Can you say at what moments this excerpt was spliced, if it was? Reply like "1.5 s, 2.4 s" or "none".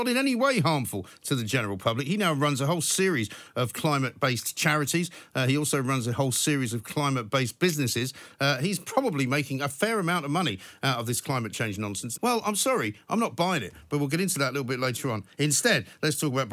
12.2 s